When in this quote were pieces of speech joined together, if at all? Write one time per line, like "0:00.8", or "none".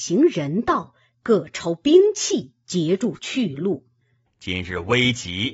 0:04.3